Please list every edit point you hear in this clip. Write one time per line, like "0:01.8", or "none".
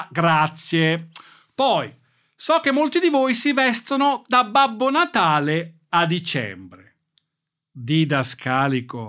none